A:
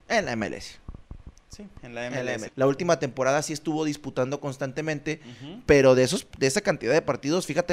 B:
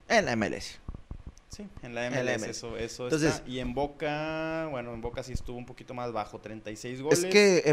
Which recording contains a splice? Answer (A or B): A